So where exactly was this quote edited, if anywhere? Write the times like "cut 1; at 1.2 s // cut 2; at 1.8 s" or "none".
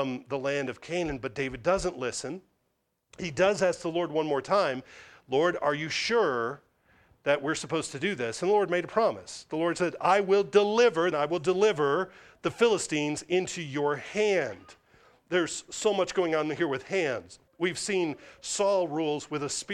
cut 1; at 11.1 s // cut 2; at 17.5 s